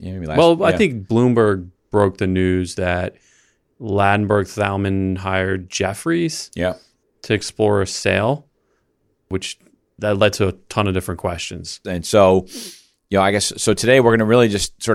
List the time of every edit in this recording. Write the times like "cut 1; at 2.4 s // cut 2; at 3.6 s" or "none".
cut 1; at 11.8 s